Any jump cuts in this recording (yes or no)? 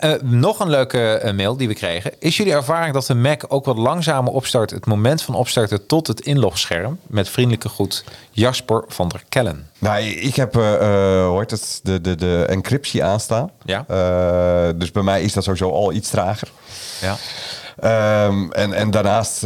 yes